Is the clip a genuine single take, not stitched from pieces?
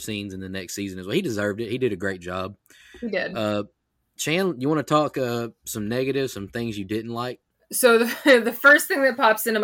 yes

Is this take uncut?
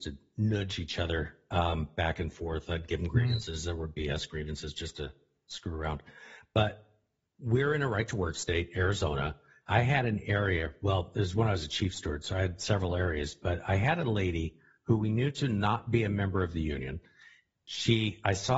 no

